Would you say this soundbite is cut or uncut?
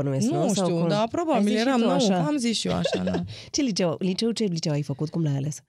uncut